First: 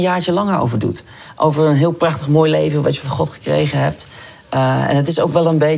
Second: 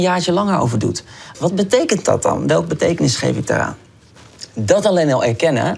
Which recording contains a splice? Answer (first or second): second